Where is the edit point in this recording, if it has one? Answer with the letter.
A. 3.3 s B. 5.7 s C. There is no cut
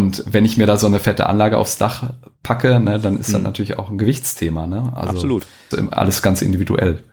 B